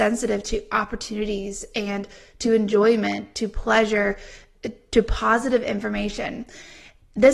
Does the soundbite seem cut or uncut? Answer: uncut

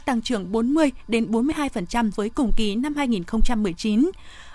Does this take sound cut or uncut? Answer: cut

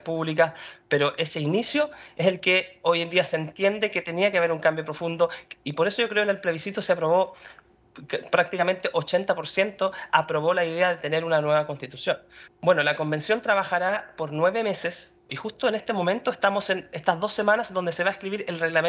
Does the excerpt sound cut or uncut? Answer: cut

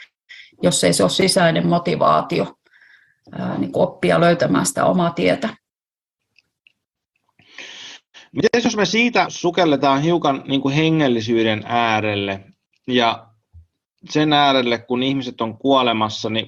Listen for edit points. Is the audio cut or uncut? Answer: cut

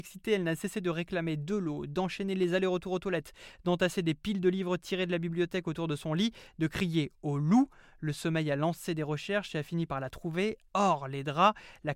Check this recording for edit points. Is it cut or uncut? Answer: uncut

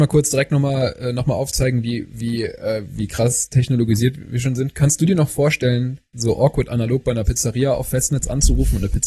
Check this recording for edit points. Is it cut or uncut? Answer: uncut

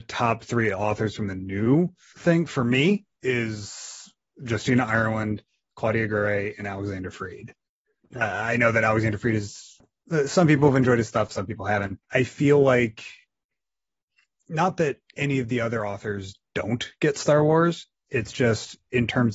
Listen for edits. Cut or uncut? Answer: cut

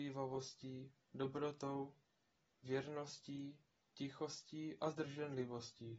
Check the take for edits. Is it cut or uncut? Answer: cut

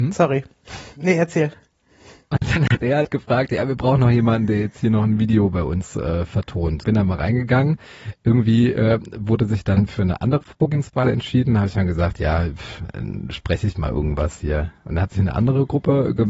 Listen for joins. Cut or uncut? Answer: cut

